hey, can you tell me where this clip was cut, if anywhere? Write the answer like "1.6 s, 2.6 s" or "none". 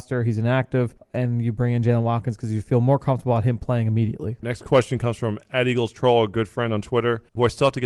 4.4 s